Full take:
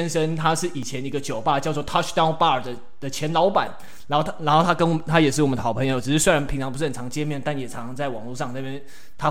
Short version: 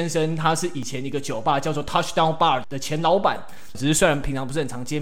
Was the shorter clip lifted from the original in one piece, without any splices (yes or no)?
no